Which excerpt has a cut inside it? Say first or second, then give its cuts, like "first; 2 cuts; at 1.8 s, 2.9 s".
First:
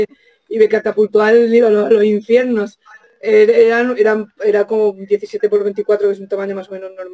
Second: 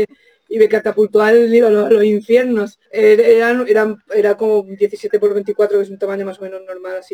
second; 1 cut; at 2.9 s